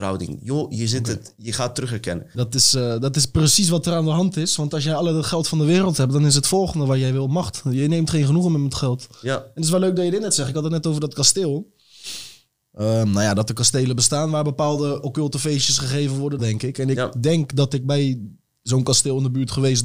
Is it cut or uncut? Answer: cut